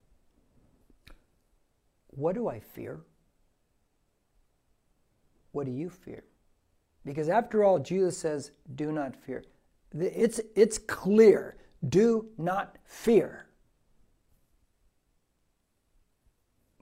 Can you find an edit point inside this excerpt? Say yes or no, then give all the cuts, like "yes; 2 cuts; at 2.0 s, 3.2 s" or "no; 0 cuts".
no; 0 cuts